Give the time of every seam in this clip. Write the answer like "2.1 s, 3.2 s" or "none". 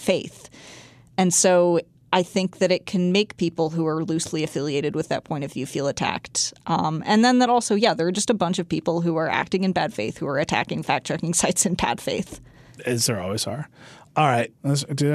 none